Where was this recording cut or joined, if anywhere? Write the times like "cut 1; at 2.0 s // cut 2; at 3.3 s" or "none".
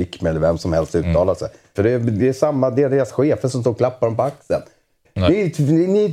cut 1; at 1.7 s // cut 2; at 5.0 s